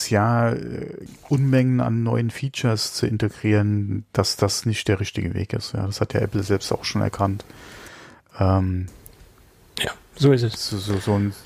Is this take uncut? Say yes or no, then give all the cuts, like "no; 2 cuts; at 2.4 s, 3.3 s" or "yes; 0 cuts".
yes; 0 cuts